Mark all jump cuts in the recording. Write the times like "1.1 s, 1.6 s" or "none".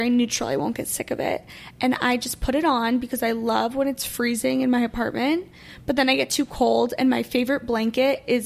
none